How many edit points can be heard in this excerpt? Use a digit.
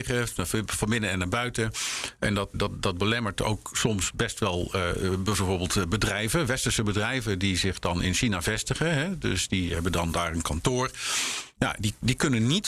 1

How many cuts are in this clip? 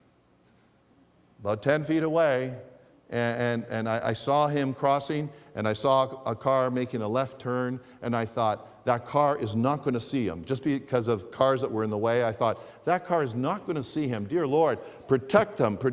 0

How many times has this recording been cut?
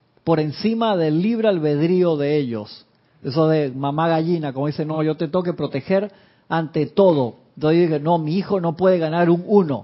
0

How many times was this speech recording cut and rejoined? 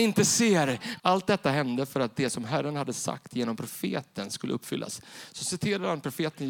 1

